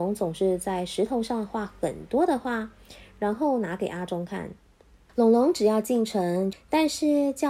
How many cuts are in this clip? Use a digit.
2